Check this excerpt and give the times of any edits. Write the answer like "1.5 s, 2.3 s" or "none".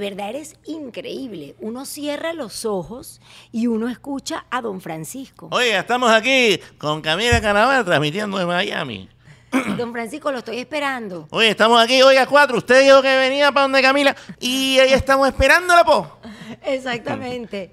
14.3 s

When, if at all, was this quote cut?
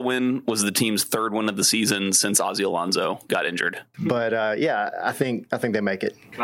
3.9 s

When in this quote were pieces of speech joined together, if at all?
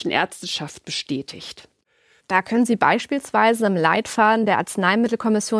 2.2 s

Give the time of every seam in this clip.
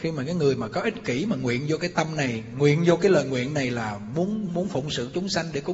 4.5 s

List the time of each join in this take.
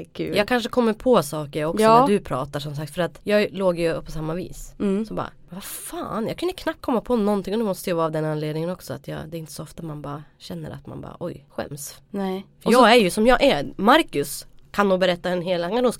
none

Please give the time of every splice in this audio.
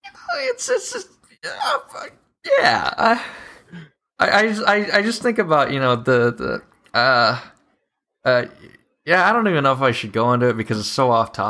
none

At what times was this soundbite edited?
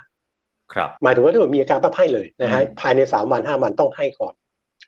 1.0 s, 2.3 s

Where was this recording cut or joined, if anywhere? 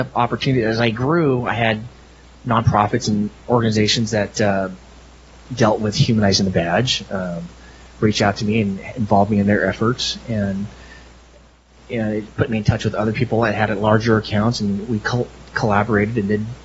none

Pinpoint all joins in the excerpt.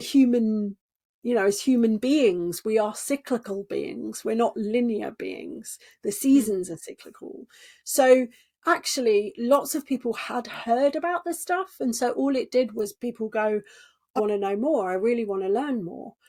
14.2 s

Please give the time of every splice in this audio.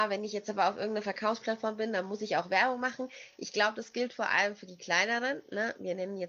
none

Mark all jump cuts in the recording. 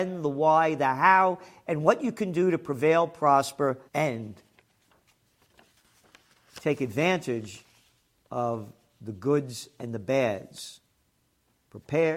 3.9 s

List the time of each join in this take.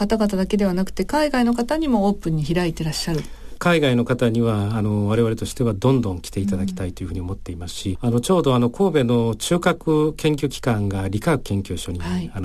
3.6 s

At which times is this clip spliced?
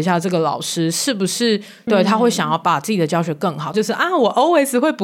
1.9 s, 3.7 s

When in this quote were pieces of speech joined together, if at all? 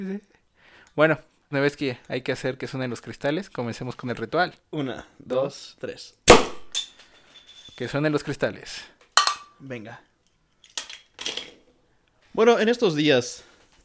1.5 s

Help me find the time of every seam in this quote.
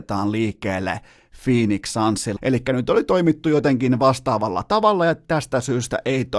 2.4 s

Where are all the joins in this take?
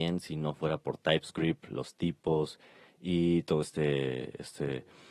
none

